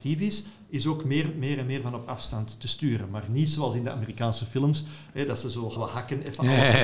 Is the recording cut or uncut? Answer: cut